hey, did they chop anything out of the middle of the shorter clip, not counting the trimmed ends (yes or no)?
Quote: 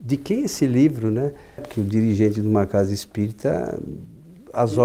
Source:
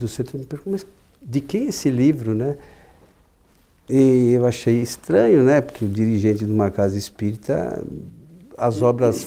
yes